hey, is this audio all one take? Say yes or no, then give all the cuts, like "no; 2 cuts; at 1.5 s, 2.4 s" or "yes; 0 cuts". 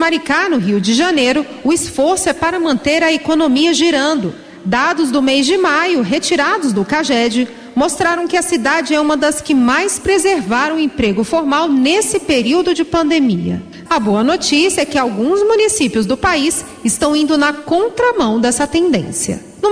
no; 1 cut; at 13.9 s